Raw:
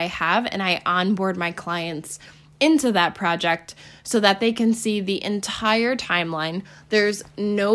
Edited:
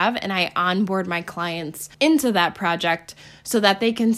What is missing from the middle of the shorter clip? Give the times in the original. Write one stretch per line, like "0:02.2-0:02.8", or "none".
0:02.2-0:02.5